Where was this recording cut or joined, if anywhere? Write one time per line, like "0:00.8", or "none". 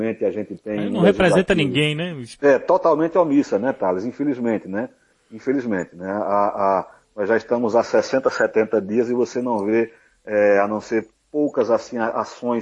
0:02.4